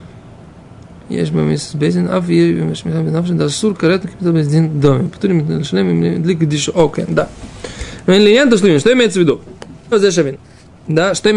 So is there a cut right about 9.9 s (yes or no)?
yes